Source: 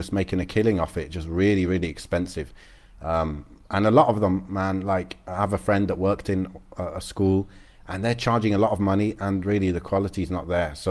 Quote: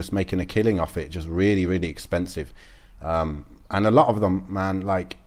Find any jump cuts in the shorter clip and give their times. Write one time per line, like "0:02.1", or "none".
none